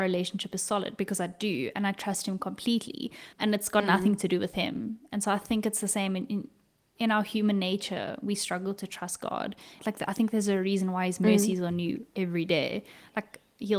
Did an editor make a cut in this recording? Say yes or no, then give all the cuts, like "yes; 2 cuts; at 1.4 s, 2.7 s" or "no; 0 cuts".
yes; 2 cuts; at 3.3 s, 9.8 s